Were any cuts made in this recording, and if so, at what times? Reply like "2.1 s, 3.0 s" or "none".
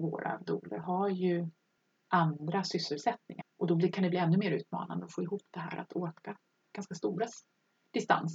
3.4 s